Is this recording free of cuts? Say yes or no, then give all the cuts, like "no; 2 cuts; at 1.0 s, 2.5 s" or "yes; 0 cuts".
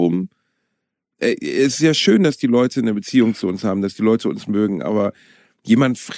yes; 0 cuts